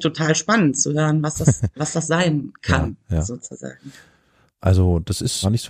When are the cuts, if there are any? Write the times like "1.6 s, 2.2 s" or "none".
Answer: none